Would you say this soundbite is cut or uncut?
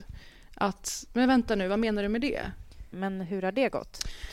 cut